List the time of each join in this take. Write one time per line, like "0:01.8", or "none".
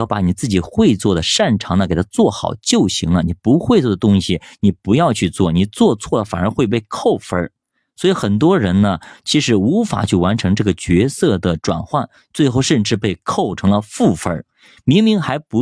none